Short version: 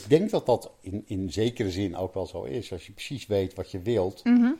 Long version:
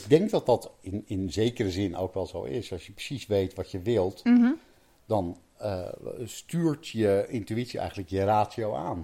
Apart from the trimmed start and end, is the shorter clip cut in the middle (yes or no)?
no